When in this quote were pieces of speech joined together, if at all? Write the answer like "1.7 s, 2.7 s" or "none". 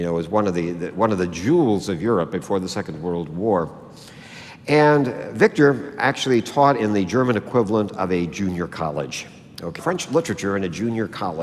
9.8 s